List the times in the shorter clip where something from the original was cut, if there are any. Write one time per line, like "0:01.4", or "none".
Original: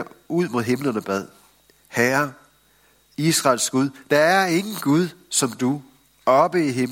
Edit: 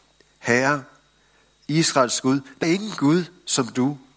0:02.6

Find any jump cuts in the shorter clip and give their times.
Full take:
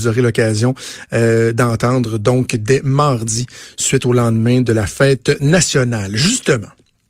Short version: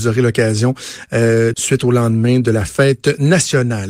0:01.5

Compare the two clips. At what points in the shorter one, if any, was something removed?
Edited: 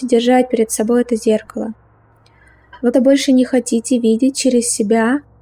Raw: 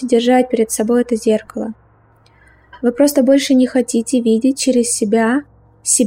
0:02.9

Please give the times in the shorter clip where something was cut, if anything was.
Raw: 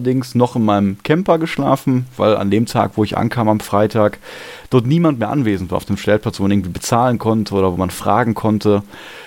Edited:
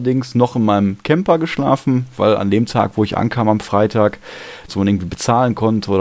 0:04.7

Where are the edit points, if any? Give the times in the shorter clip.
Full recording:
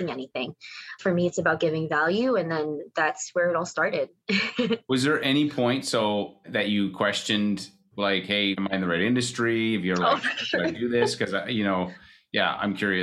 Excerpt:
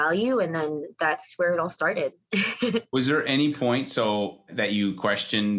none

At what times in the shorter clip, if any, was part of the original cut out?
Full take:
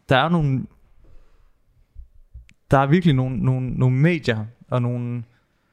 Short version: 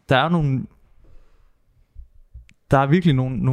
none

